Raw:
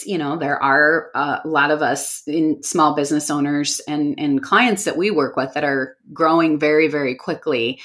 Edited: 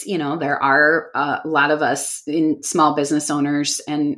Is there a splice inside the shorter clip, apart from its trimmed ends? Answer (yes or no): no